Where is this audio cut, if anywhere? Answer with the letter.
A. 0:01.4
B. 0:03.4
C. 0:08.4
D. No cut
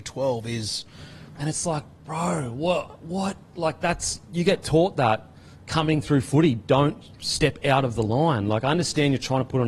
A